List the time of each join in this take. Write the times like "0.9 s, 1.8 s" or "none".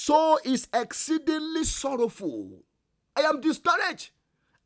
none